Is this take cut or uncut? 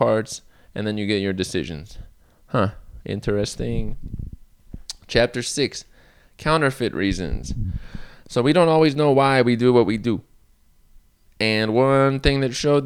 uncut